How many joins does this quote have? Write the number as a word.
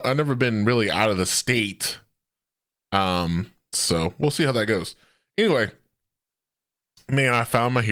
one